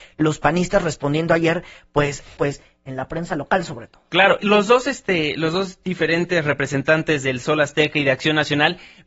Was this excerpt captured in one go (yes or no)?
no